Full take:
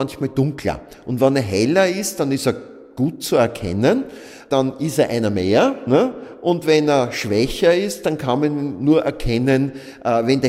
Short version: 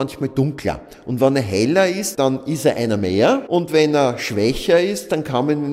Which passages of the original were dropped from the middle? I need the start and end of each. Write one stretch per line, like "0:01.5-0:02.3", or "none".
0:02.1-0:04.5
0:05.8-0:06.4